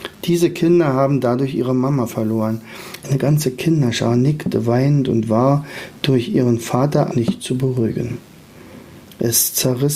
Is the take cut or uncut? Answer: cut